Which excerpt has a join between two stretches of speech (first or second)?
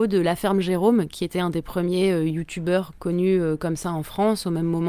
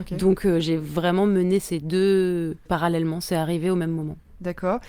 second